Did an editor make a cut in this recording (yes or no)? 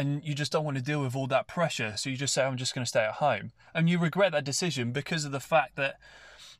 no